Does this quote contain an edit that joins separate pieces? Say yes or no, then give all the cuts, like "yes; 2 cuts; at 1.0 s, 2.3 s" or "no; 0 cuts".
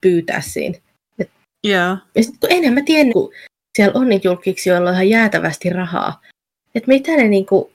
yes; 1 cut; at 3.1 s